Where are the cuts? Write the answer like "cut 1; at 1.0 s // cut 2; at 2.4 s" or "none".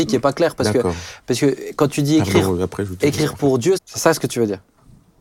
cut 1; at 3.7 s